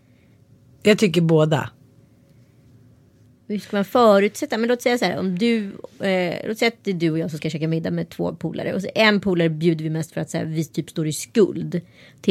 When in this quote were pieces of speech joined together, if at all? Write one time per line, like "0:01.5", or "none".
none